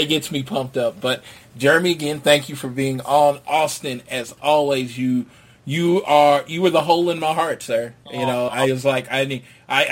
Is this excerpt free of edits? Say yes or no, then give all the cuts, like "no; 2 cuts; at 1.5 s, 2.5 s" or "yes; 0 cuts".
yes; 0 cuts